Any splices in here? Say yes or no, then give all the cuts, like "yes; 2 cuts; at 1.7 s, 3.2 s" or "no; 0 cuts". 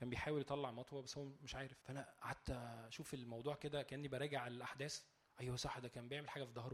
yes; 1 cut; at 1.8 s